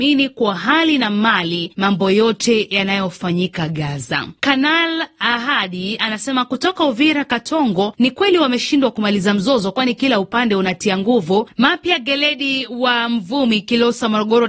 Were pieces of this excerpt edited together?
yes; 1 cut; at 11.5 s

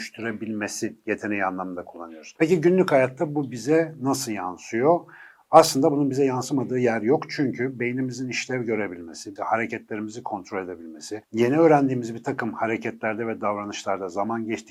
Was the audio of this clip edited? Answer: yes; 1 cut; at 9.4 s

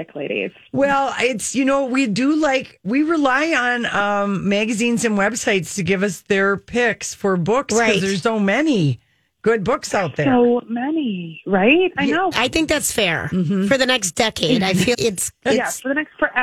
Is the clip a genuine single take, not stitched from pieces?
no; 3 cuts; at 8.2 s, 12.3 s, 14.9 s

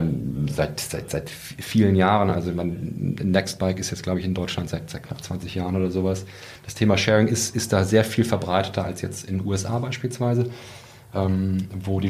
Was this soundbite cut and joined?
no; 0 cuts

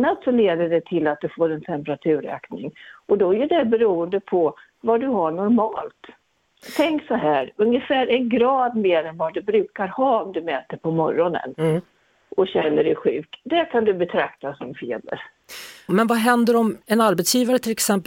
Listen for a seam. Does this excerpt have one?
yes; 1 cut; at 15.9 s

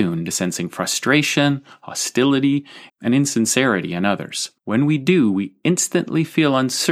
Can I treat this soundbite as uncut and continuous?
no; 2 cuts; at 2.9 s, 4.6 s

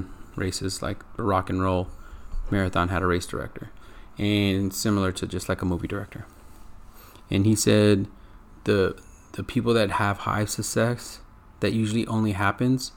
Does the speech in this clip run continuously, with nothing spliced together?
yes; 0 cuts

